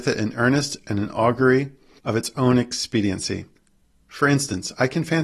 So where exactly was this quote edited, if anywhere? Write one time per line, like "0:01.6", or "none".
none